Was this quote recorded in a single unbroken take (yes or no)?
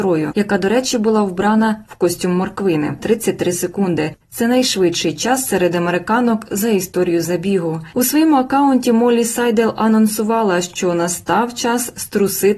no